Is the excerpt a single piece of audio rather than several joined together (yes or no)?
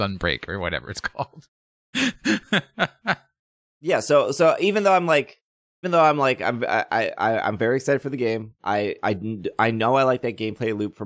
no